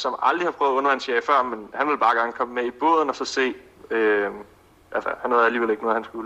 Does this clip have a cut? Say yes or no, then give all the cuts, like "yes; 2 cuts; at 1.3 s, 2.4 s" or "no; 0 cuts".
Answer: no; 0 cuts